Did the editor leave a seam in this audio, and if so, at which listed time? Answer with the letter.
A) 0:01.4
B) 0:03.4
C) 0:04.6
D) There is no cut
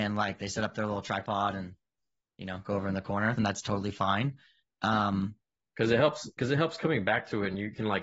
B